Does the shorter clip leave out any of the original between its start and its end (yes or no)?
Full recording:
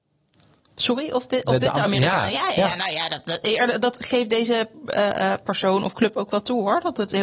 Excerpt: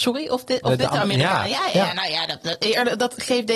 no